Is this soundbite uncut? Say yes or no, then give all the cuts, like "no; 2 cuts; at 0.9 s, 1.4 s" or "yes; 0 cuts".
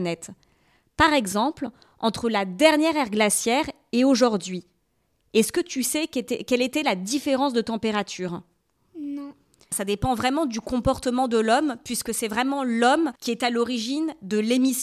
no; 2 cuts; at 9.7 s, 13.2 s